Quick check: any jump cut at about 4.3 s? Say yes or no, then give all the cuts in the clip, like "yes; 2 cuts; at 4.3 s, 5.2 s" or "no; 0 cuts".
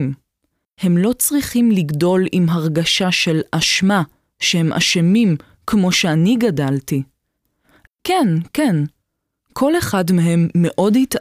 no; 1 cut; at 7.9 s